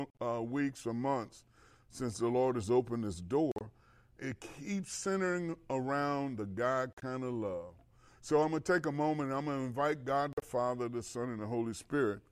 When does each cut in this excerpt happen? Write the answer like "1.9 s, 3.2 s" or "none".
none